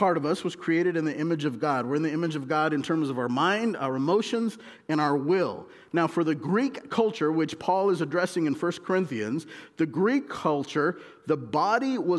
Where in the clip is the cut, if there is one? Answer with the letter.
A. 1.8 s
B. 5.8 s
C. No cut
C